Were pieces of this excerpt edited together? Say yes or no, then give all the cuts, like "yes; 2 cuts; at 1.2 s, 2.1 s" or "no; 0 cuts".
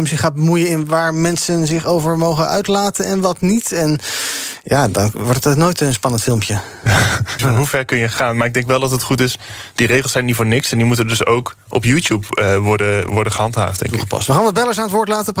yes; 1 cut; at 7.4 s